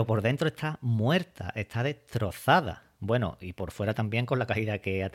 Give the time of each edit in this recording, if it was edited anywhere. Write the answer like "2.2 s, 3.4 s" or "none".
none